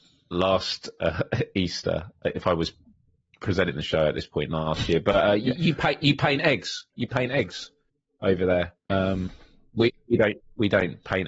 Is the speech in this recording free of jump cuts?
no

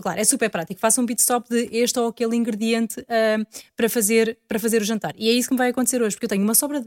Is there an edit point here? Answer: no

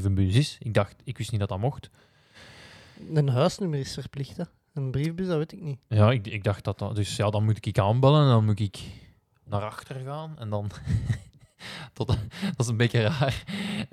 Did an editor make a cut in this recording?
no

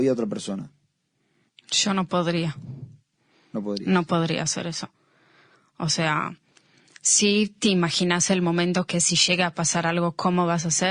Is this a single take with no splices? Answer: yes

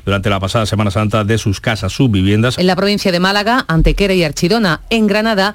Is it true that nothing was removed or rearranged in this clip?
no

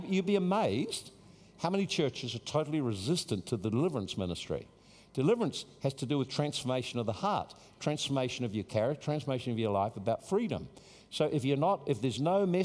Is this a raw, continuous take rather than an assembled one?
yes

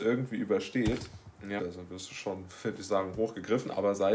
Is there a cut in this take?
yes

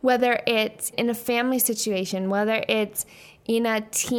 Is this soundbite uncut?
no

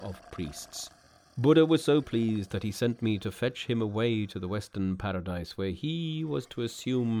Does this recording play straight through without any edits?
yes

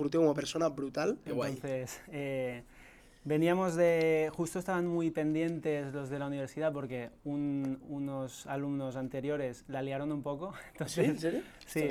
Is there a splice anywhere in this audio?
yes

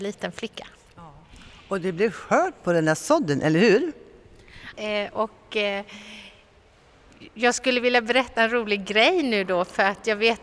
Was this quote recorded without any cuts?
no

